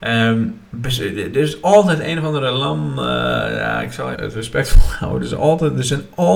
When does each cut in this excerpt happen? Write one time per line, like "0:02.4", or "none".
0:04.1